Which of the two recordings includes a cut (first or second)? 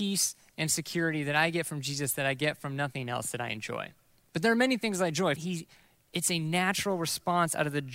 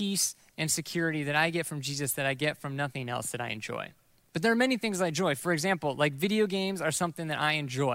first